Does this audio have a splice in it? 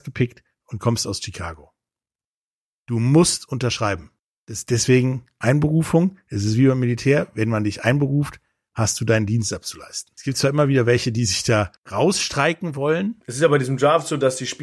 no; 0 cuts

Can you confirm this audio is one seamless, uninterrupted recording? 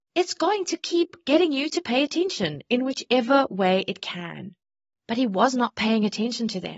no; 1 cut; at 5.0 s

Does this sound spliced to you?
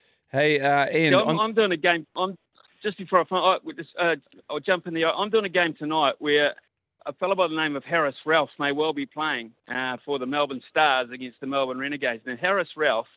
yes; 1 cut; at 7.0 s

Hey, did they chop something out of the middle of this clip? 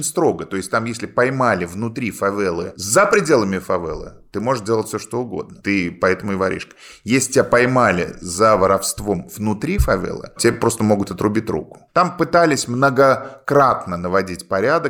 no; 0 cuts

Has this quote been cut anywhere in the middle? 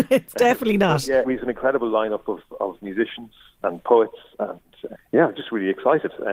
yes; 2 cuts; at 1.2 s, 4.9 s

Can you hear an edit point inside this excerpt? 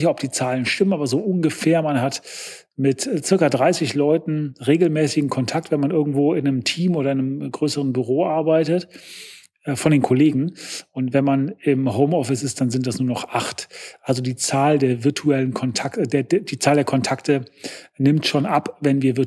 no; 0 cuts

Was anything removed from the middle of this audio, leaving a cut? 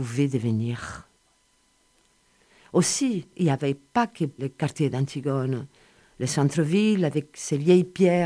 yes; 1 cut; at 4.4 s

